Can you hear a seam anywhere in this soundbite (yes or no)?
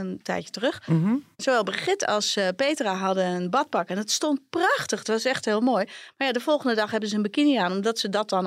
no